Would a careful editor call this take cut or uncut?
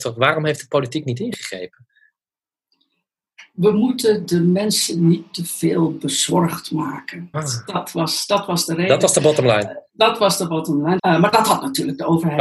cut